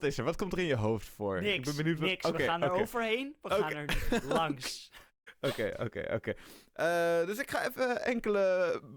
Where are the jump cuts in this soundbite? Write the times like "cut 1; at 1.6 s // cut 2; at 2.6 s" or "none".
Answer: none